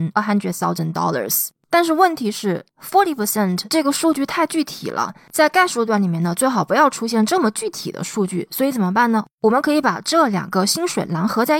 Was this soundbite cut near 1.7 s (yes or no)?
no